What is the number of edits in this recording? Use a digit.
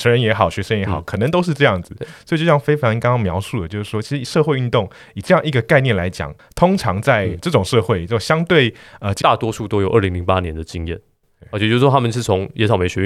1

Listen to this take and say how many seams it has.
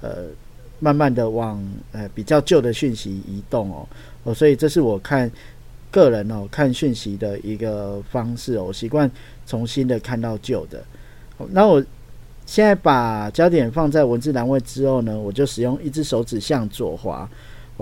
0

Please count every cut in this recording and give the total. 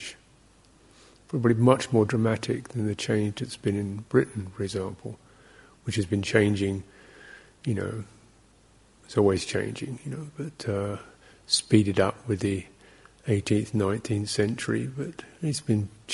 0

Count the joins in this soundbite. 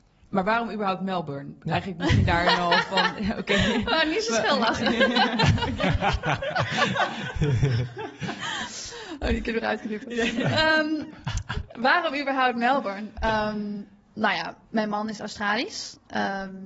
1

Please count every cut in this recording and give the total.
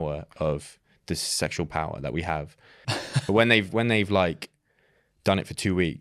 1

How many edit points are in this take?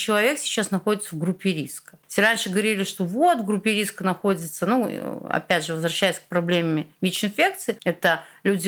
0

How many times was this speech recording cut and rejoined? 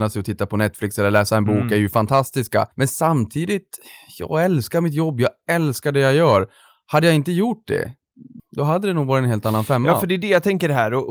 2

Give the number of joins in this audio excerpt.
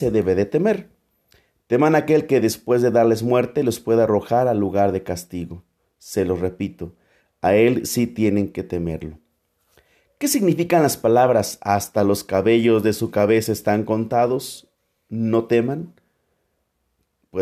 0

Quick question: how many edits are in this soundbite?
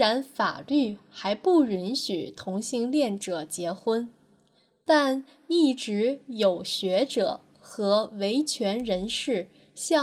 0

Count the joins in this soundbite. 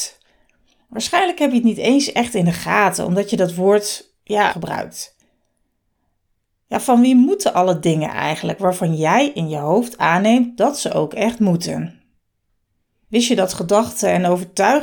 1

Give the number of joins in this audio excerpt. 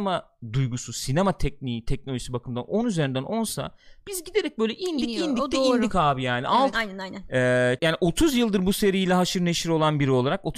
2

